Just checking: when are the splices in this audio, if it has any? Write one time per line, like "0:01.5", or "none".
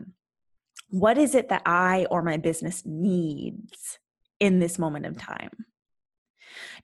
none